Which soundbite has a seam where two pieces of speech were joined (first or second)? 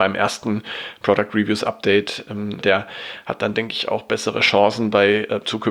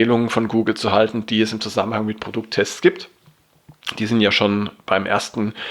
first